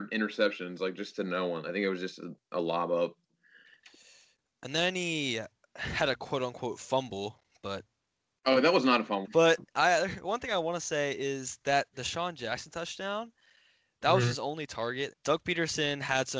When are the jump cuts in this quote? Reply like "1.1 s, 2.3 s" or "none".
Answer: 9.2 s, 15.1 s